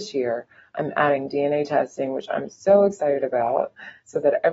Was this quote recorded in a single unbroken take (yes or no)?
yes